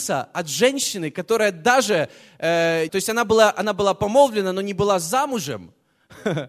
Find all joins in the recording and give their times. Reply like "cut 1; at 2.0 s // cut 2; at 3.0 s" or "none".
cut 1; at 2.9 s